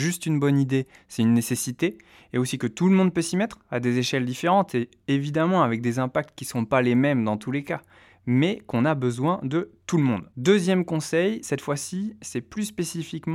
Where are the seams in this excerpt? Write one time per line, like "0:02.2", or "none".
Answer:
none